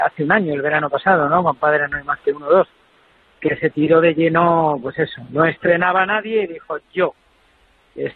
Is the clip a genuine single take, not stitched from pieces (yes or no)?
yes